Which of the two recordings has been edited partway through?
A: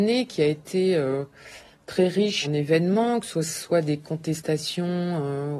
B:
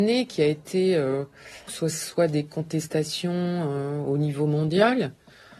B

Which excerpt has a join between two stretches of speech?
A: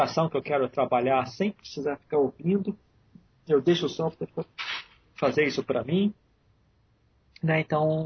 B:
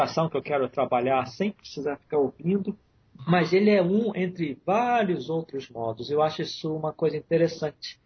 B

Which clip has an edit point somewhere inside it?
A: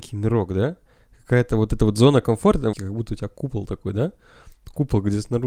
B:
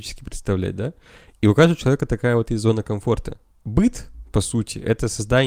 A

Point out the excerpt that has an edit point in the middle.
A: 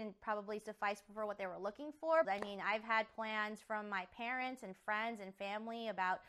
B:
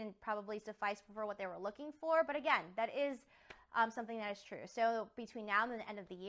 A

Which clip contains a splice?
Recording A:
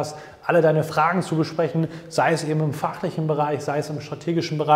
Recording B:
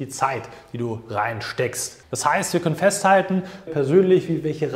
B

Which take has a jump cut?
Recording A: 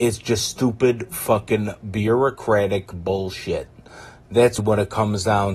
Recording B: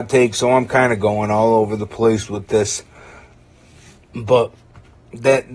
A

